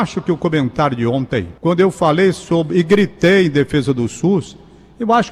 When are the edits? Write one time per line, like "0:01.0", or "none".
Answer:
0:01.6